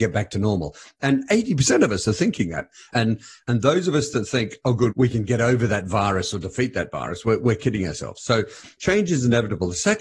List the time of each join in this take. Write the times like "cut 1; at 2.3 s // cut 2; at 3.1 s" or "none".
cut 1; at 2.9 s